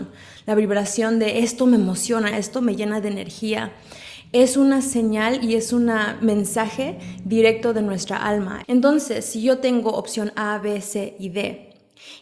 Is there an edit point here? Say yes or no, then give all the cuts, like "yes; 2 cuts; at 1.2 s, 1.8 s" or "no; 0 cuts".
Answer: yes; 2 cuts; at 2.3 s, 8.6 s